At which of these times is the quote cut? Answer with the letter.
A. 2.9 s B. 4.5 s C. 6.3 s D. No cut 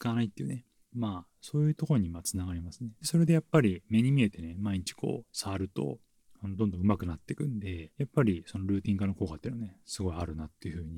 A